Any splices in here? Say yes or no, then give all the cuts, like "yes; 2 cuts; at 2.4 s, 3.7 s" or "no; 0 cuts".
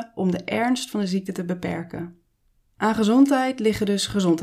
no; 0 cuts